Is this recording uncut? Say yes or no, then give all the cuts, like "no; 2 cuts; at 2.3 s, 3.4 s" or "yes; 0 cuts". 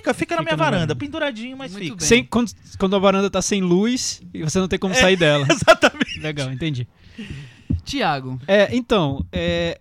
yes; 0 cuts